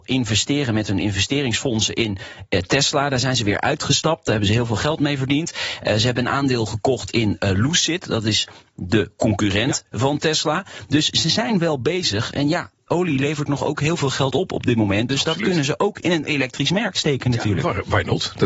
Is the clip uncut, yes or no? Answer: yes